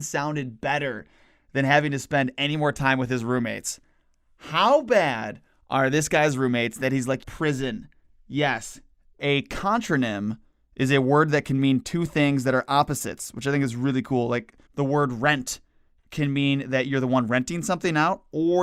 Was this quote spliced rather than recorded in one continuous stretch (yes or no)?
yes